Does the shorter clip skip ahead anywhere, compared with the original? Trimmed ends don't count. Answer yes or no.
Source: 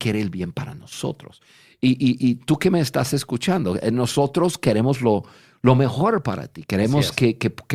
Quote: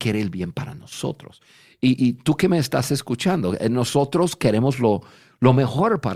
yes